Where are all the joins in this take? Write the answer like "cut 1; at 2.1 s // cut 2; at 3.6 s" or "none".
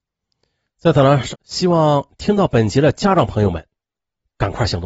cut 1; at 1.3 s